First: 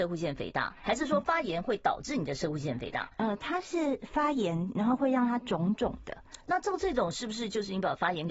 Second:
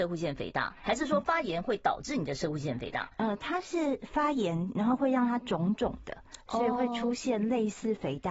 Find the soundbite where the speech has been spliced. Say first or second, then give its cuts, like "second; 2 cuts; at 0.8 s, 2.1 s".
first; 1 cut; at 6.4 s